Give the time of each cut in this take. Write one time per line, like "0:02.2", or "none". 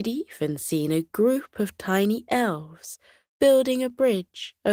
none